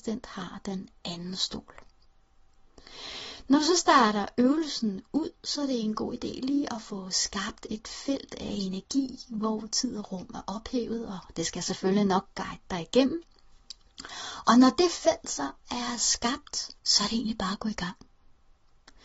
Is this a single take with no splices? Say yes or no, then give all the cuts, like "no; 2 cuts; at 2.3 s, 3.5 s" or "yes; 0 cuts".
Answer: no; 1 cut; at 16.8 s